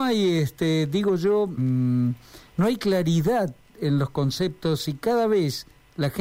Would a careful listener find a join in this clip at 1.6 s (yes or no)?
yes